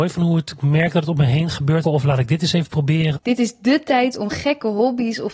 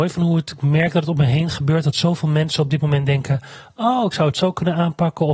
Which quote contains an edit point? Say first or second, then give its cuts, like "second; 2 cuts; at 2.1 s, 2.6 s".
first; 2 cuts; at 1.8 s, 3.2 s